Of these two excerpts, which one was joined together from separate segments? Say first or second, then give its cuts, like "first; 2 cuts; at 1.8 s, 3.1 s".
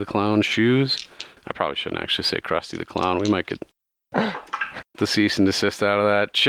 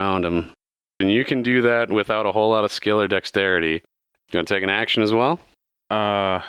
second; 2 cuts; at 1.0 s, 4.2 s